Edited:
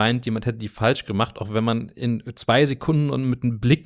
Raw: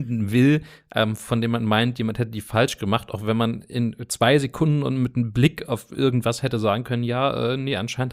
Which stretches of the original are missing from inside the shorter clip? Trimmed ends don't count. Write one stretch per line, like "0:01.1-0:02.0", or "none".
none

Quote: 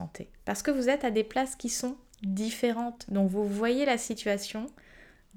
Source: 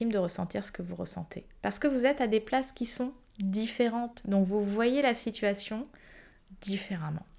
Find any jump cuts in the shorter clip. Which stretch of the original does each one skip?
none

